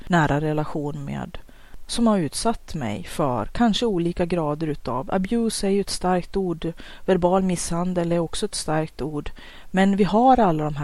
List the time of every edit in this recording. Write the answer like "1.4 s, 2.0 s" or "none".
none